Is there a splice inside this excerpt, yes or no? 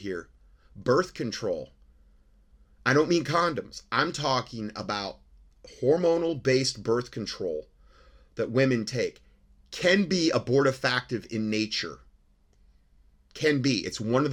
no